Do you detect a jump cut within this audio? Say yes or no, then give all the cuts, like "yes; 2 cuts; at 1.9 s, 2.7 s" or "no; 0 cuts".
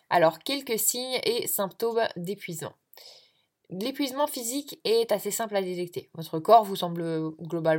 no; 0 cuts